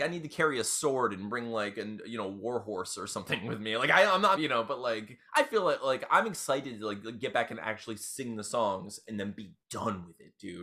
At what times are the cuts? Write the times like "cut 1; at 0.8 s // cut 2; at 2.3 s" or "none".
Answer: cut 1; at 4.4 s